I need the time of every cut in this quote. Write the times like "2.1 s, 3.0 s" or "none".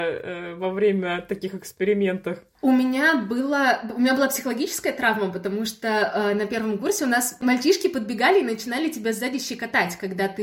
none